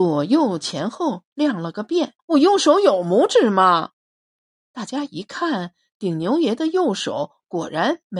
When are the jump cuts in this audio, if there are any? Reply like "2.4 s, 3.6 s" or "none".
2.2 s